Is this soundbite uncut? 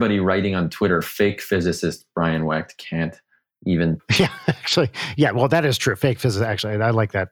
yes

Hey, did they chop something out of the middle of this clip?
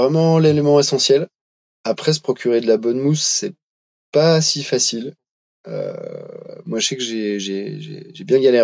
no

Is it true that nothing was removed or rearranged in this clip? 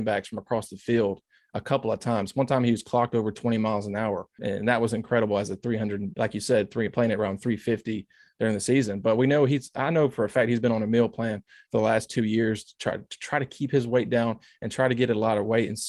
no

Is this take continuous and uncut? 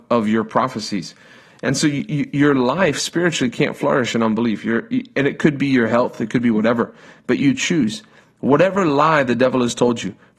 yes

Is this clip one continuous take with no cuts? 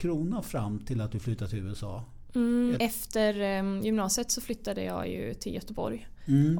no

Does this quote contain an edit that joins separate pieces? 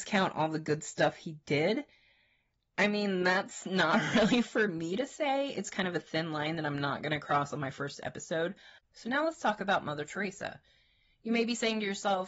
yes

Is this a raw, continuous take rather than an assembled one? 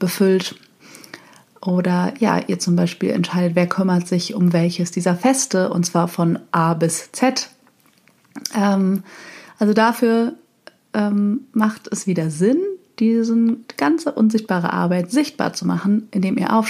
yes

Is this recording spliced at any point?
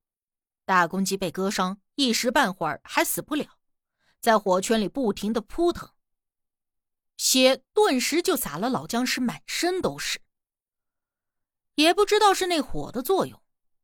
no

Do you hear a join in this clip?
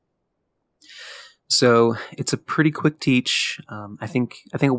no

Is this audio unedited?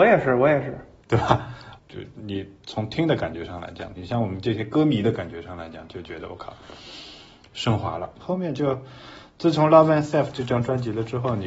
no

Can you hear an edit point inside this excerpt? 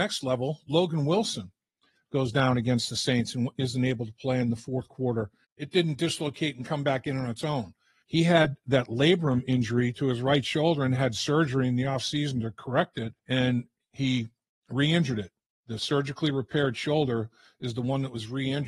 yes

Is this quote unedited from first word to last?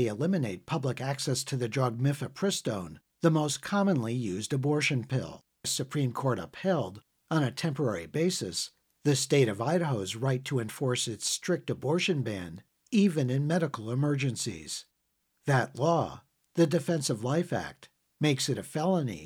no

